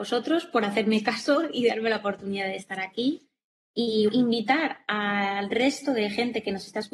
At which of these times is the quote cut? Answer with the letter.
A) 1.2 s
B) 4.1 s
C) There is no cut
B